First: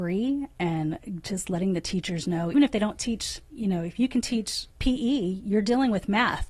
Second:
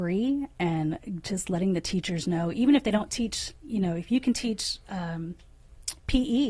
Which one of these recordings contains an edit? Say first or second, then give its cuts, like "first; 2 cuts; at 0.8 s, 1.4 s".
first; 2 cuts; at 2.5 s, 4.7 s